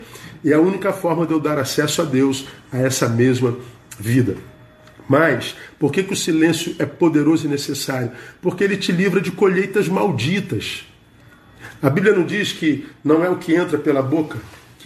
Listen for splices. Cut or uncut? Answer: uncut